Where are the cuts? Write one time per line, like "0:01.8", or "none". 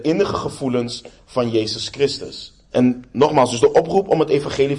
0:02.7